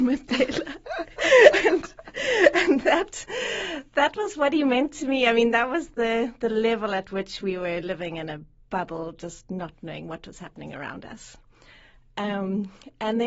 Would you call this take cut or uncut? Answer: uncut